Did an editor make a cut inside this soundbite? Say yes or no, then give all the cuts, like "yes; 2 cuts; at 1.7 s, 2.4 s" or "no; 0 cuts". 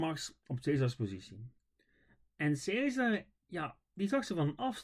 no; 0 cuts